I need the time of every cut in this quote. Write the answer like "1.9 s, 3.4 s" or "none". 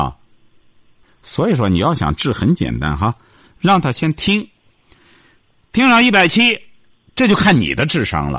1.0 s